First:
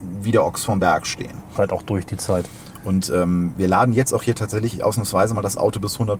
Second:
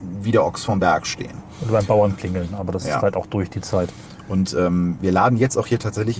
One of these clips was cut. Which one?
first; 1 cut; at 1.6 s

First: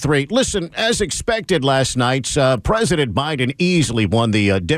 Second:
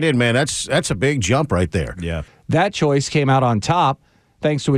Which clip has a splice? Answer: second; 1 cut; at 2.3 s

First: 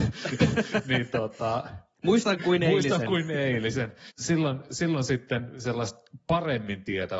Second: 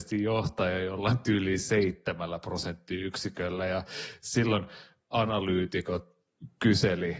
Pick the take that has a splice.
first; 1 cut; at 4.1 s

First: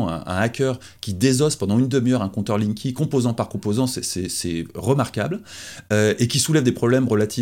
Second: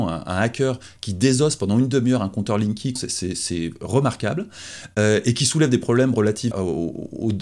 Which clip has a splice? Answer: second; 2 cuts; at 3.0 s, 6.5 s

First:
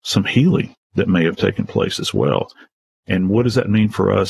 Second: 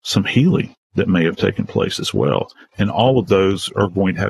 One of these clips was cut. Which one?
second; 1 cut; at 2.7 s

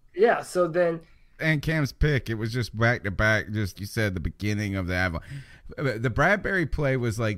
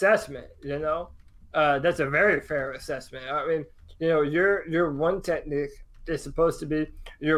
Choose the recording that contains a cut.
first; 2 cuts; at 1.4 s, 3.7 s

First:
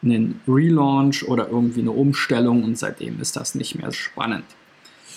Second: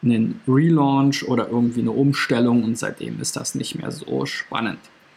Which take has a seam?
first; 1 cut; at 3.9 s

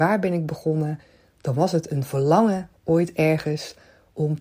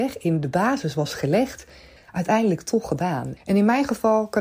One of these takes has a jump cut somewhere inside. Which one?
second; 2 cuts; at 2.0 s, 3.4 s

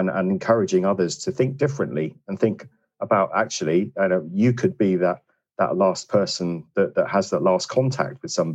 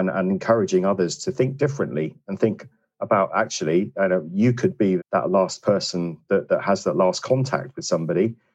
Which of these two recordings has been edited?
second; 1 cut; at 5.0 s

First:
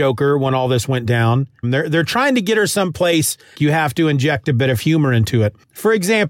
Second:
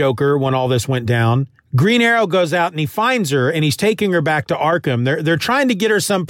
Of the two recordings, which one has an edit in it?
first; 2 cuts; at 1.6 s, 3.5 s

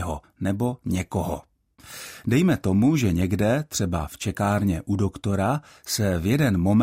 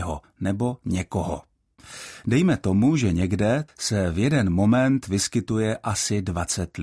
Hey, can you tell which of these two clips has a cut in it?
second; 1 cut; at 3.7 s

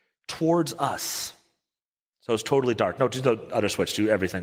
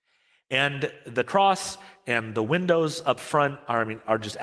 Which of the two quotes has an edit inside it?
first; 1 cut; at 2.1 s

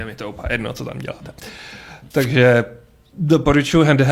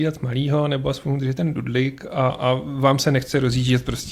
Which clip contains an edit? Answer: second; 1 cut; at 2.3 s

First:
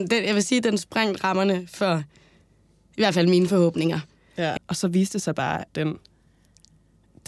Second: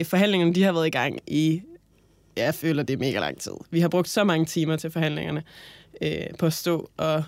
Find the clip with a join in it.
first; 2 cuts; at 4.6 s, 5.7 s

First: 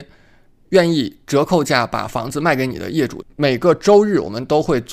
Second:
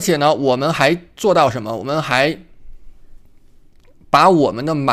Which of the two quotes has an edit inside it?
first; 1 cut; at 3.2 s

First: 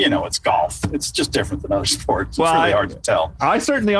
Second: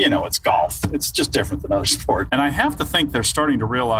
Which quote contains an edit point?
second; 1 cut; at 2.3 s

